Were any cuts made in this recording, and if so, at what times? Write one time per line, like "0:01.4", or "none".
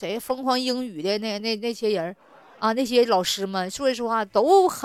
0:01.4